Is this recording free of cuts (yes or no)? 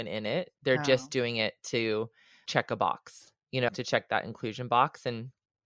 no